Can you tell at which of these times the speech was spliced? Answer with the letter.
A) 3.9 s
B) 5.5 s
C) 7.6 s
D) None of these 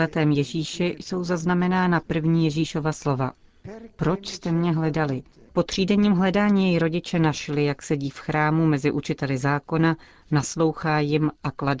B